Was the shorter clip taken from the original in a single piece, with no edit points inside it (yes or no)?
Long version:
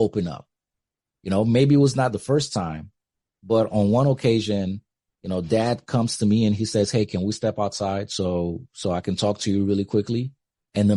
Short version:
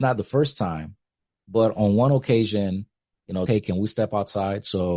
no